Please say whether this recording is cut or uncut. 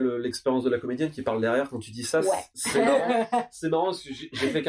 uncut